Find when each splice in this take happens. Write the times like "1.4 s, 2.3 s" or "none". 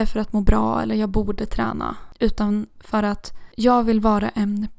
none

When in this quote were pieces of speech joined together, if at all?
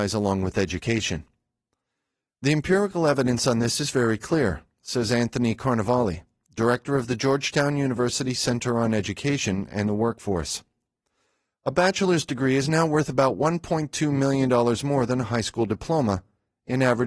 none

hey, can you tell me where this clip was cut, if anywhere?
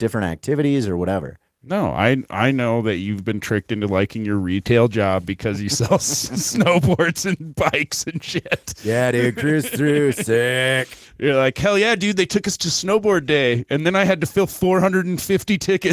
none

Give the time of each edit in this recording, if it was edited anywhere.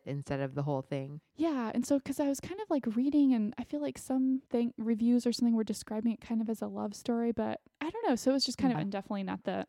4.5 s, 8.7 s

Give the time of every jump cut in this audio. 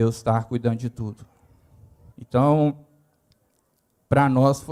2.1 s

